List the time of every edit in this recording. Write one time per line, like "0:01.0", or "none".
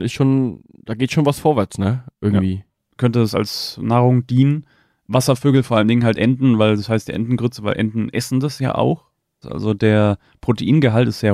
0:03.0
0:09.4